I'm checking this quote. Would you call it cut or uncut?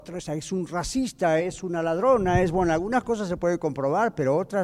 cut